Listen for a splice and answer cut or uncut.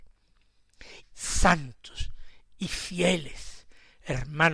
cut